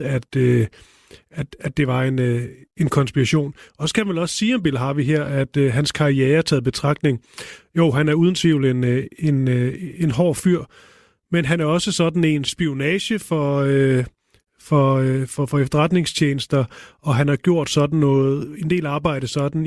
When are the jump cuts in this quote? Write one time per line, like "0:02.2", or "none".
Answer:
0:12.5